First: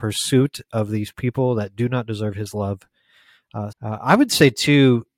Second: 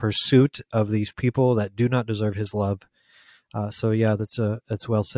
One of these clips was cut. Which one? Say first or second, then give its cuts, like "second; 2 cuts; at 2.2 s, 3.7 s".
first; 1 cut; at 3.7 s